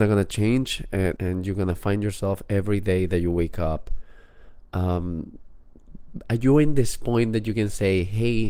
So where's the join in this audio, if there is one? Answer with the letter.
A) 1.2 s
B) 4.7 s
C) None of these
A